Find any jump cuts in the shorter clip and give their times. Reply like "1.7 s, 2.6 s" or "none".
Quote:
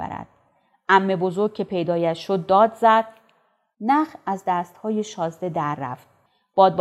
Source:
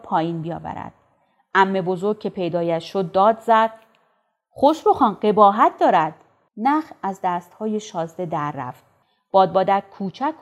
3.7 s